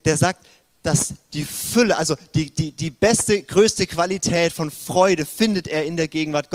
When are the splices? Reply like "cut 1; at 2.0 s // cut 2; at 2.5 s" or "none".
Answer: none

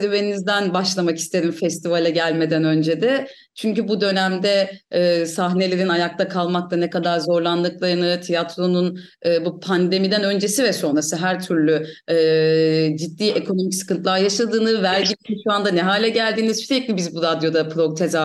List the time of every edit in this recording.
none

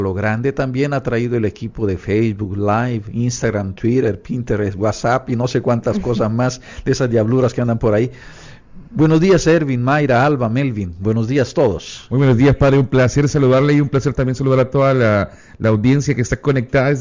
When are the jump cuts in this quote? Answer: none

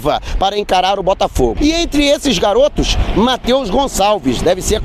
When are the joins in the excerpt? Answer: cut 1; at 1.6 s

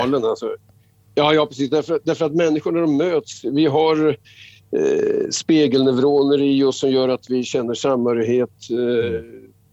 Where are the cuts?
none

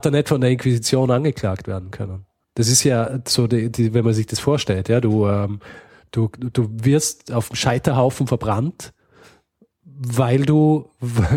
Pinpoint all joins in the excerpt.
none

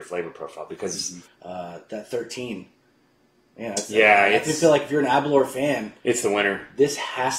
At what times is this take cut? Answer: cut 1; at 1.2 s

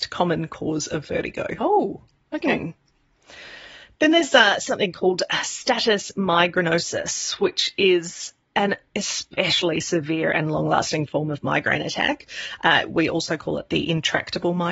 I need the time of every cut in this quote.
none

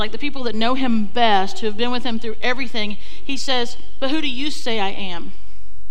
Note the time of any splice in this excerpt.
none

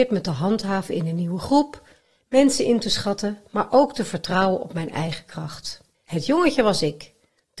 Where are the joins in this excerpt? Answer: cut 1; at 5.9 s

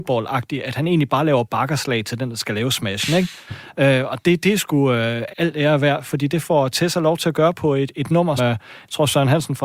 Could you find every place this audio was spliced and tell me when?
cut 1; at 5.3 s // cut 2; at 8.4 s

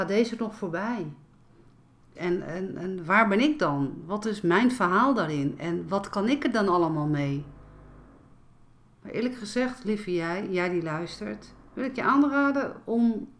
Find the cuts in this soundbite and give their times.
cut 1; at 2.2 s

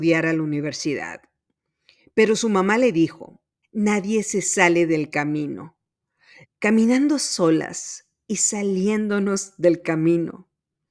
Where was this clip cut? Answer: cut 1; at 3.6 s // cut 2; at 6.4 s

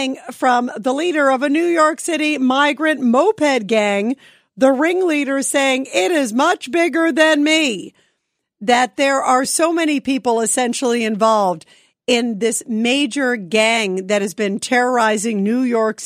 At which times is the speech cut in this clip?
none

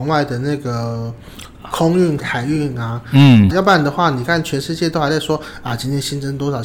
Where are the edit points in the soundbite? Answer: cut 1; at 2.2 s // cut 2; at 3.5 s

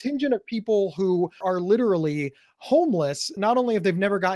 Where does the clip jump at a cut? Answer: cut 1; at 1.4 s // cut 2; at 3.4 s

